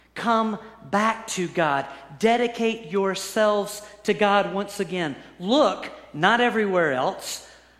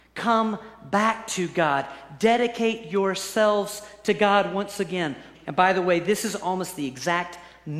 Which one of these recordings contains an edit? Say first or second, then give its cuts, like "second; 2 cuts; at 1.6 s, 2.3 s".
second; 1 cut; at 5.3 s